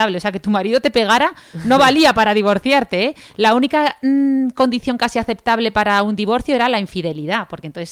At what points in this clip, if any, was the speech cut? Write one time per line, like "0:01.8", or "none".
none